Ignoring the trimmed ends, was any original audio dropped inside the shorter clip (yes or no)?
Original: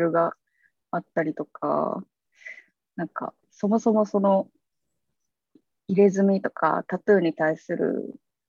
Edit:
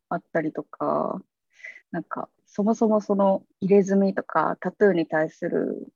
yes